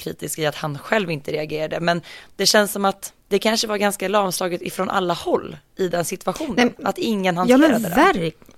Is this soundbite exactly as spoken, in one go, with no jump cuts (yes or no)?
no